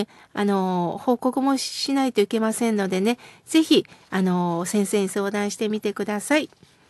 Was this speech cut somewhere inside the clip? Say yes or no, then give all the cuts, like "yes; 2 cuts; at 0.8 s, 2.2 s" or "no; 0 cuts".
no; 0 cuts